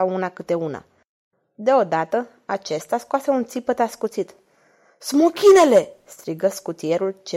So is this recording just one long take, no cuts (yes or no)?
yes